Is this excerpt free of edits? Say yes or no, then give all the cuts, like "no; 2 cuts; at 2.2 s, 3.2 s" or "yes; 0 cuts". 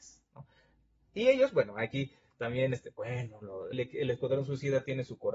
no; 1 cut; at 3.7 s